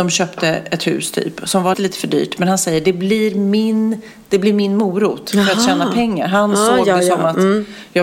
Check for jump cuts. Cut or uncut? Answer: cut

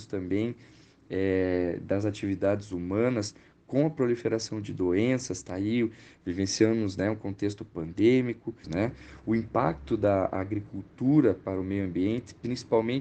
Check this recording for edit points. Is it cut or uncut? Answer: cut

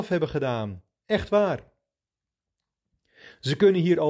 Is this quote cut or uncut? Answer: uncut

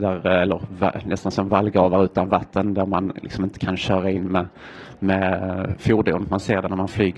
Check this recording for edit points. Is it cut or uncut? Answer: uncut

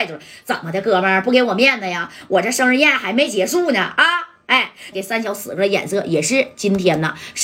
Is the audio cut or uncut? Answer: cut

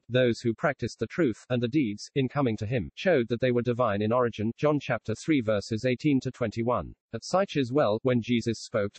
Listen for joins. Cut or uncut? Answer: cut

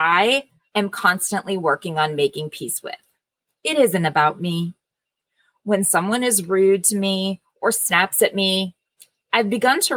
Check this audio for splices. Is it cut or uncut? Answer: uncut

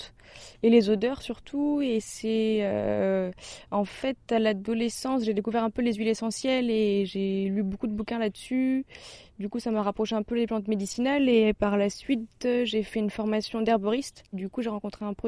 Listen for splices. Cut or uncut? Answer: cut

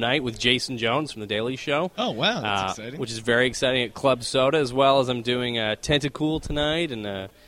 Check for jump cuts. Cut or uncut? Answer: uncut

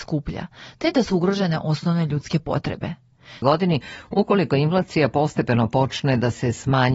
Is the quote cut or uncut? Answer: cut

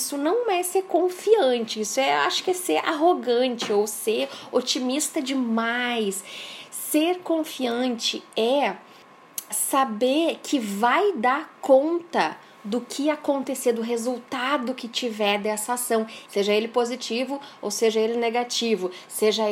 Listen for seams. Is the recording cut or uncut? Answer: cut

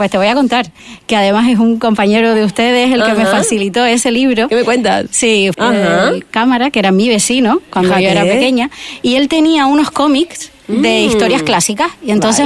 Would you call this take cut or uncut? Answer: cut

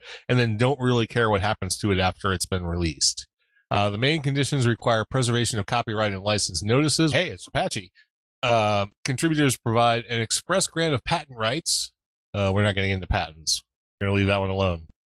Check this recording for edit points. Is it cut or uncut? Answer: cut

